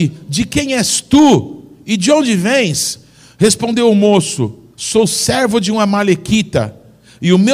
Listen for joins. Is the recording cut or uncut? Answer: cut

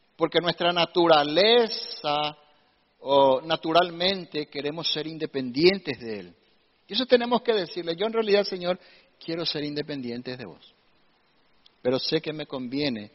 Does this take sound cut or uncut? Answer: uncut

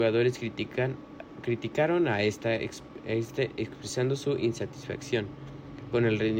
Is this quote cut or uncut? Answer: uncut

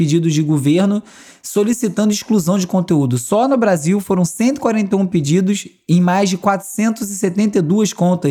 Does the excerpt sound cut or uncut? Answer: uncut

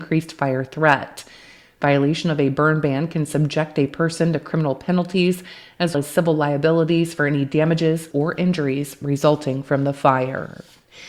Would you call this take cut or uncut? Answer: cut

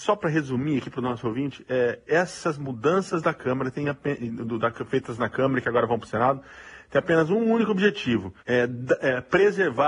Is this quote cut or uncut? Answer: cut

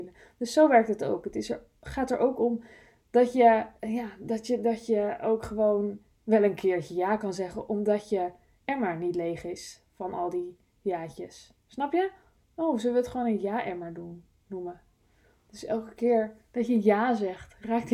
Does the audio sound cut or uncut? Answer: uncut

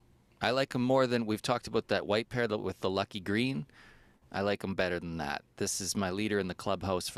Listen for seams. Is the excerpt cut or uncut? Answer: uncut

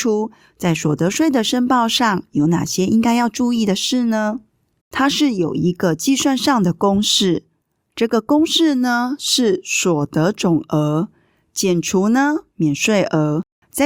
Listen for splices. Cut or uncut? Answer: cut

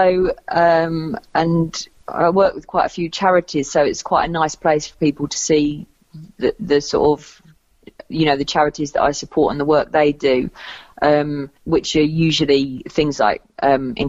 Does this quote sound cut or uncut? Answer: cut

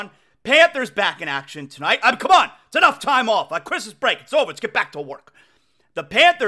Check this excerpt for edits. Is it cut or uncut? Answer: uncut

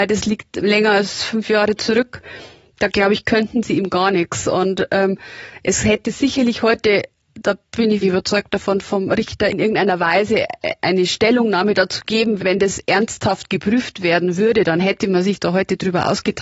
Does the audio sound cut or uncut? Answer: cut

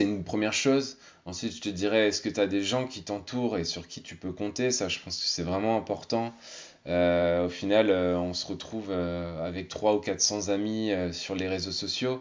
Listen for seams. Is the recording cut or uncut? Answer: uncut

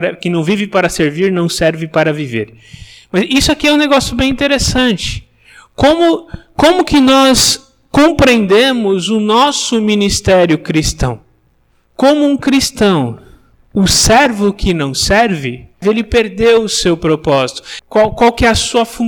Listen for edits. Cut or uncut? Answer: cut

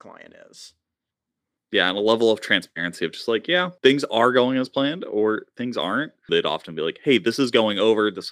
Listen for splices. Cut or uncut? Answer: cut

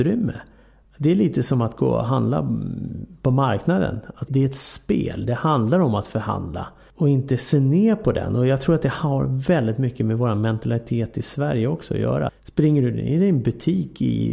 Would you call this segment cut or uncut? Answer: cut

